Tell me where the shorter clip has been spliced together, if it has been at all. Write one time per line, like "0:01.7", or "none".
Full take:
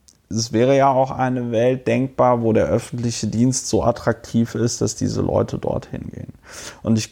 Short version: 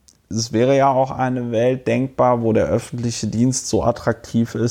none